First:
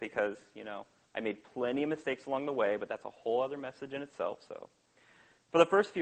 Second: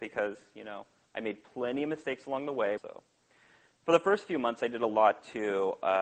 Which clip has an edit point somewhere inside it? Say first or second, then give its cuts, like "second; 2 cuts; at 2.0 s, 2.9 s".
second; 1 cut; at 2.8 s